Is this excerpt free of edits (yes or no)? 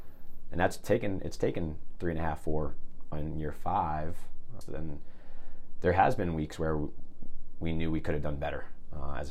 no